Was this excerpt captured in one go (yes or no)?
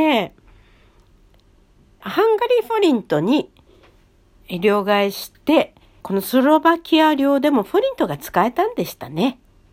no